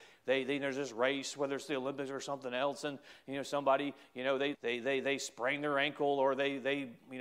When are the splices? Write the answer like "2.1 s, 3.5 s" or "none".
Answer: 4.5 s